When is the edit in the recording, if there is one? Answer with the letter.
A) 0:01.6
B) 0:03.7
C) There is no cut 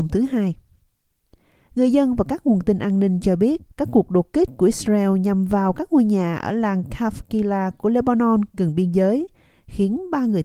B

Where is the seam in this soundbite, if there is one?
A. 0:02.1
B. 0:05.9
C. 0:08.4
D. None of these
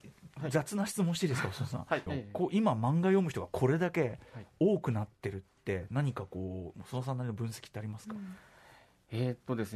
A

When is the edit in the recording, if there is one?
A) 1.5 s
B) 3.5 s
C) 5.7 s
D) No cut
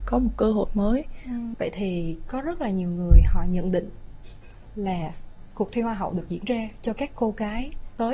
A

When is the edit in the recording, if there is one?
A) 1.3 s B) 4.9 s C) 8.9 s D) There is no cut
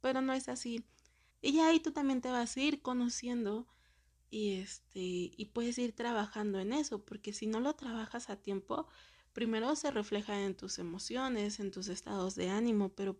A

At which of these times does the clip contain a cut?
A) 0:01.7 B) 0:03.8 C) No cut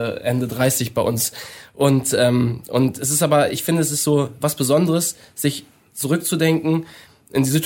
C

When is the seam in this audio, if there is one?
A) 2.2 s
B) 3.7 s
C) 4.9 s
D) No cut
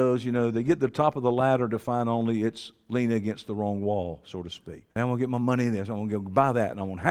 C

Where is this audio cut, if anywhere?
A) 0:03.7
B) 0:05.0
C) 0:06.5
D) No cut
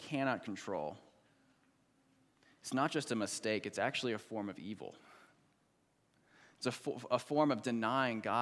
D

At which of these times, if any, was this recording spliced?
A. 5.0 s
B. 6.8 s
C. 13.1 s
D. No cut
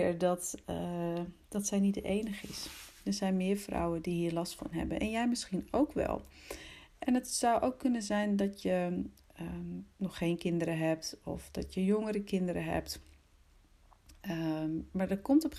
D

